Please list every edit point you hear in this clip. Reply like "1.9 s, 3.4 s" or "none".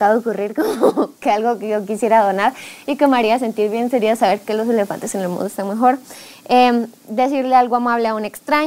none